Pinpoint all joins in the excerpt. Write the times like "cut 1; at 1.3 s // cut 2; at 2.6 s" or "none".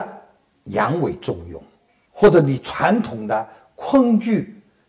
cut 1; at 2.1 s